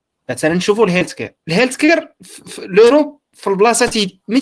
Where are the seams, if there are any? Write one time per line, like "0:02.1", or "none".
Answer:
0:01.4